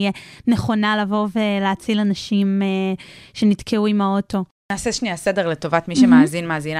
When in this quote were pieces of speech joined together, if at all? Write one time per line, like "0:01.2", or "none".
none